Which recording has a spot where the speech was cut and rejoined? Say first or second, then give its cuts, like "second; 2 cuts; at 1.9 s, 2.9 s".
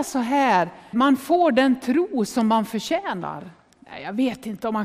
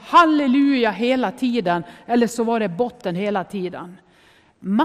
first; 1 cut; at 0.9 s